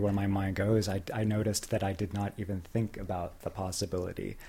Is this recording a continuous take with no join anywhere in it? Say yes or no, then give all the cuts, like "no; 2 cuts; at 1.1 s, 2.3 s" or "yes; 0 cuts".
yes; 0 cuts